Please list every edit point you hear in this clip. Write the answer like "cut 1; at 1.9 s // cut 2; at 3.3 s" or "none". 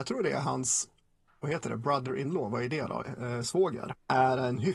none